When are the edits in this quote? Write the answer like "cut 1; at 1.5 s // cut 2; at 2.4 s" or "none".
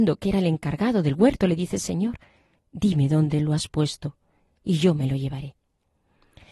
cut 1; at 2.6 s